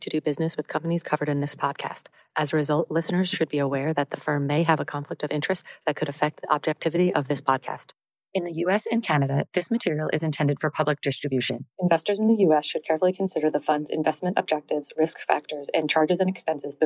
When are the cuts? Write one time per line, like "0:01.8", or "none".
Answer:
0:11.7